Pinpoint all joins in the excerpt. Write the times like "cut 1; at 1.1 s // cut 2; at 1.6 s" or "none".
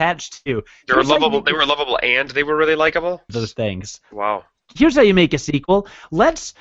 cut 1; at 3.3 s

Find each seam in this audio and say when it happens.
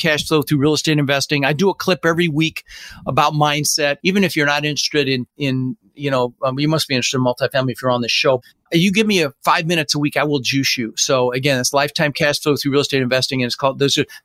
cut 1; at 4.0 s

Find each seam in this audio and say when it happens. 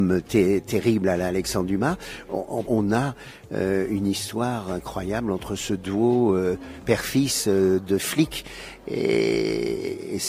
cut 1; at 2.6 s

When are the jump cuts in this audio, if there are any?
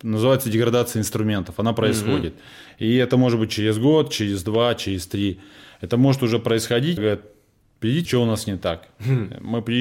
cut 1; at 7.0 s // cut 2; at 8.1 s

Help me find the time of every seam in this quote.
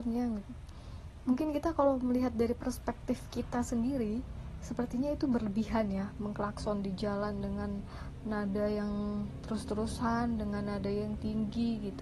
none

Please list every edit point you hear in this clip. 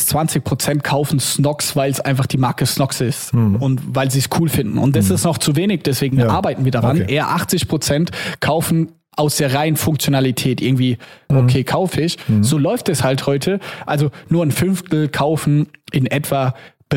cut 1; at 11.3 s

